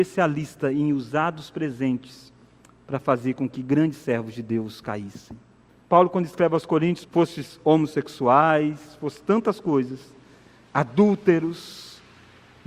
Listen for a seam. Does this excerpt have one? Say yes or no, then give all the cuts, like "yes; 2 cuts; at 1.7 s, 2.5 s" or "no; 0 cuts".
yes; 2 cuts; at 5.7 s, 7.0 s